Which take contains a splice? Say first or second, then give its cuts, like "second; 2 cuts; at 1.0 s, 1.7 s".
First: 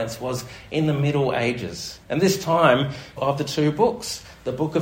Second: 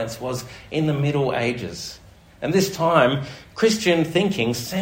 first; 2 cuts; at 2.0 s, 3.2 s